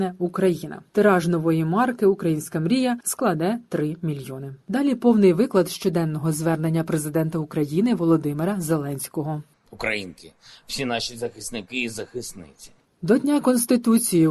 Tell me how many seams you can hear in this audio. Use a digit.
2